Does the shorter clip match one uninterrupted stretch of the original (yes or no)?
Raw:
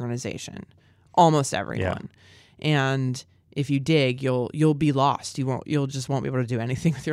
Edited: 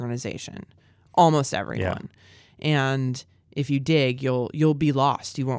yes